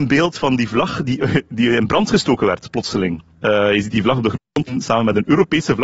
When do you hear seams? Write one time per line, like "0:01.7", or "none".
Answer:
0:03.3